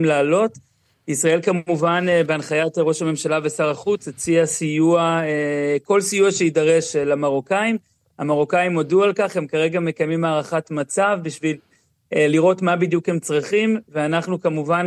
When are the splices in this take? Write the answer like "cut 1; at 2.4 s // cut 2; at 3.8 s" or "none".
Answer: none

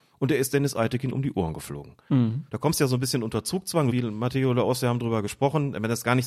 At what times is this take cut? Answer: cut 1; at 2.5 s // cut 2; at 3.9 s

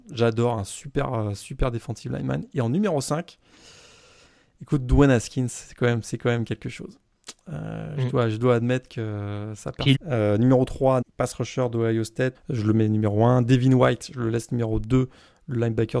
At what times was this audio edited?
cut 1; at 9.9 s // cut 2; at 11.0 s // cut 3; at 12.3 s

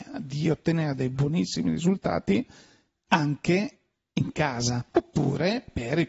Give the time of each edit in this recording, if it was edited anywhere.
cut 1; at 4.9 s

